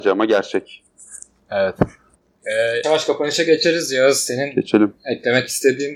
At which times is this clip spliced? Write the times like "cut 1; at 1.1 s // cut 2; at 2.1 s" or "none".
cut 1; at 2.8 s